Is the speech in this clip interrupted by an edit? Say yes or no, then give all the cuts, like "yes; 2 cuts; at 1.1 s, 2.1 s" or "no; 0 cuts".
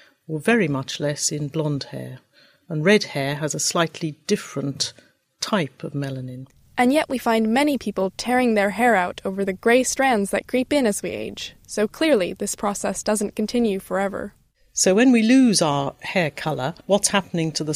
no; 0 cuts